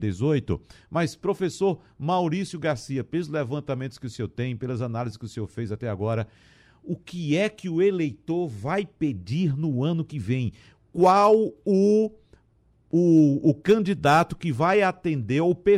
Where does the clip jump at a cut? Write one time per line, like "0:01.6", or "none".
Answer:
none